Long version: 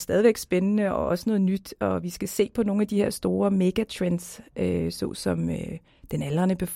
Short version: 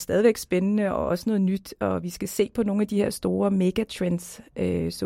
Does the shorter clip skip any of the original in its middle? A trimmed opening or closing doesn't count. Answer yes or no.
no